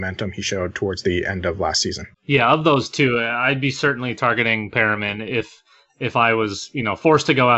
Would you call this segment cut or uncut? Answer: cut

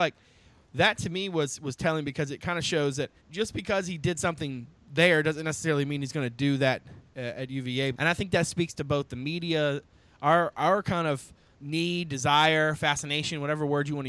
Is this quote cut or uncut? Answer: cut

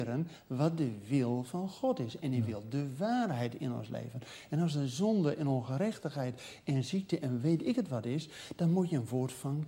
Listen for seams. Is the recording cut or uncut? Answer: uncut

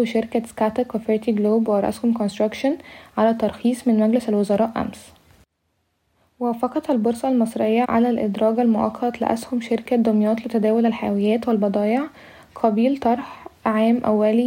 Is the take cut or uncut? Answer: cut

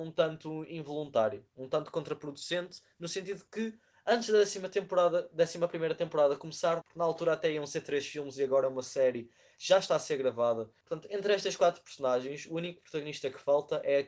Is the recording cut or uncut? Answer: cut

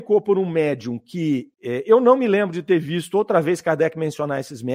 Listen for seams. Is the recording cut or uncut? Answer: cut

